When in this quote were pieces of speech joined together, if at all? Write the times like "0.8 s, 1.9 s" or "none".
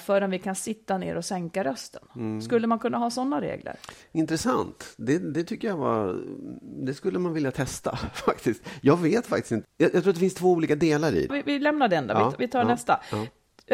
9.6 s, 11.3 s

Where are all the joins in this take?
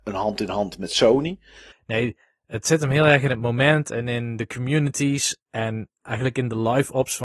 1.7 s

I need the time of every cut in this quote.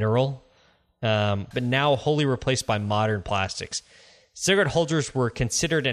1.5 s

